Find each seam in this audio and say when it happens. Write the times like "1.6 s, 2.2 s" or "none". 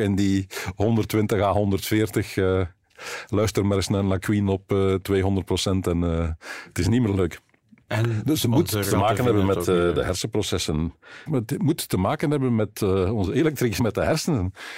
11.3 s, 13.8 s